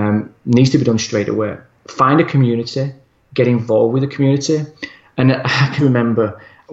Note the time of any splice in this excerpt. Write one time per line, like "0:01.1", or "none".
0:05.8